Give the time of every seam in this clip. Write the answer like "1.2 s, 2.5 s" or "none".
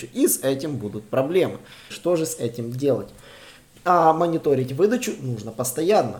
1.9 s